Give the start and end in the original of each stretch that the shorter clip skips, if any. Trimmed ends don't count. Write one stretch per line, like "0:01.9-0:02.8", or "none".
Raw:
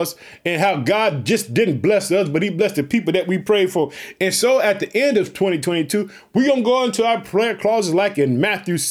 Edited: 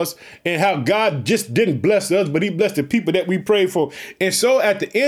none